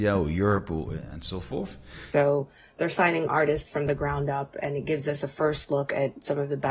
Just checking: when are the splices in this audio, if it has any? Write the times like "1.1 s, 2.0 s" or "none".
2.1 s